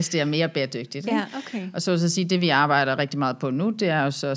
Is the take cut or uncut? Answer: uncut